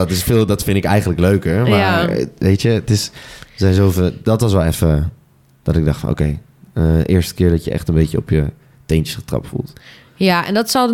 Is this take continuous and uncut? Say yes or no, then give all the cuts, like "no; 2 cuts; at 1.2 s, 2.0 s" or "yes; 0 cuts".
yes; 0 cuts